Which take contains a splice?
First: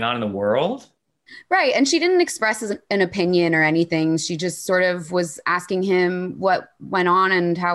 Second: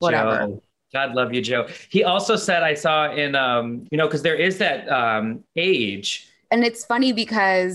second; 2 cuts; at 3.9 s, 6.5 s

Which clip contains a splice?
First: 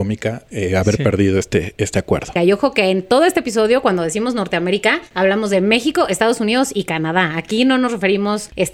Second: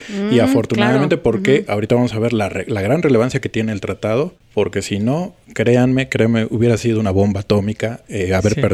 first; 1 cut; at 2.4 s

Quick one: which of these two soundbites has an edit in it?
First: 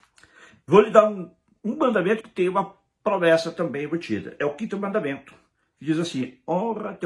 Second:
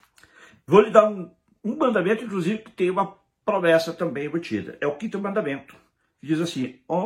first; 1 cut; at 2.2 s

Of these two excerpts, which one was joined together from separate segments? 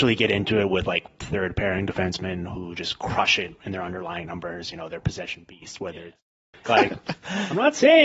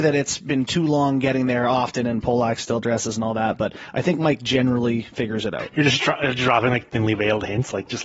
first; 1 cut; at 6.6 s

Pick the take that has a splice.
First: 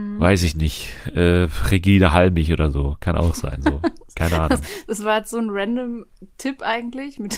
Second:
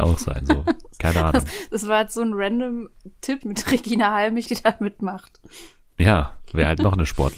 second; 2 cuts; at 3.4 s, 4.5 s

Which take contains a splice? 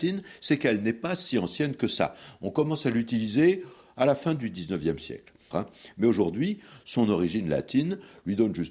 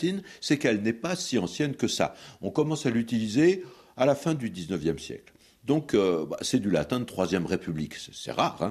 first; 1 cut; at 5.5 s

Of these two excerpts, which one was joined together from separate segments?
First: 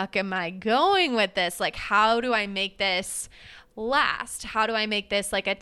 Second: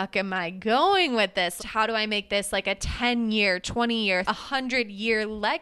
second; 2 cuts; at 1.6 s, 4.3 s

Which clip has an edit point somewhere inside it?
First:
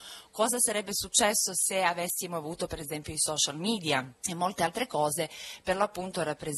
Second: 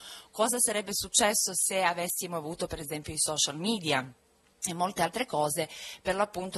first; 1 cut; at 4.2 s

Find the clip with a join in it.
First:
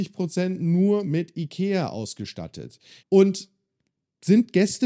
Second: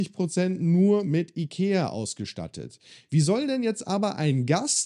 first; 1 cut; at 3.0 s

